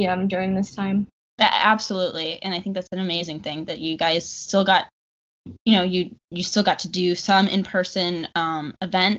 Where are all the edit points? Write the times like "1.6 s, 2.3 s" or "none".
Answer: none